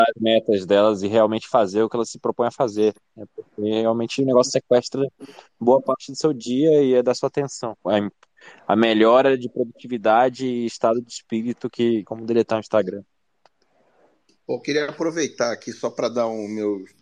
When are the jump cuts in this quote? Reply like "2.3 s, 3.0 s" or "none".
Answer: 7.8 s, 12.1 s